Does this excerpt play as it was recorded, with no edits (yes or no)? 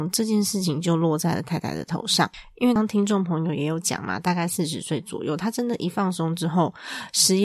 no